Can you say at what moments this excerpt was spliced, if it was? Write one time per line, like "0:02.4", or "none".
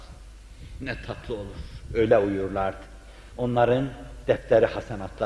0:03.3